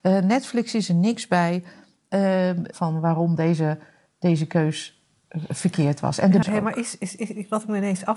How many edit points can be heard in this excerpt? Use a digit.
2